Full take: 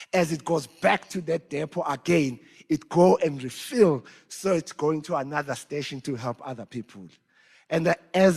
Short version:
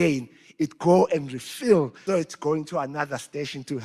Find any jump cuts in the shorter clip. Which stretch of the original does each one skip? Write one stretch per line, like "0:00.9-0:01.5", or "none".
0:04.2-0:04.4